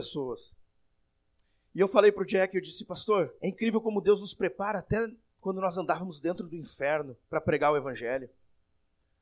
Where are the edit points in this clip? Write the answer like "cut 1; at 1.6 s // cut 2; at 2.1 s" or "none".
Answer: cut 1; at 3.4 s // cut 2; at 7.2 s